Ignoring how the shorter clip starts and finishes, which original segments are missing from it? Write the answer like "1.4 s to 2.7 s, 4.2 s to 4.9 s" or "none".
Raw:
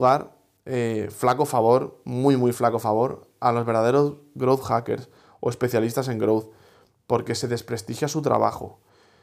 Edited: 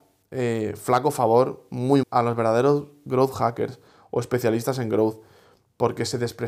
2.4 s to 3.3 s